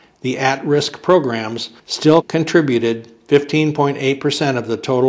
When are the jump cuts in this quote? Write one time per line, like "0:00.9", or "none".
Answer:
0:01.8